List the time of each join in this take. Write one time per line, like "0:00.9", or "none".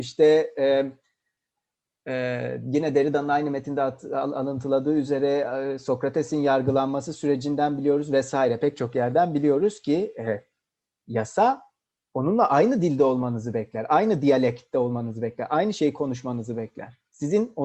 none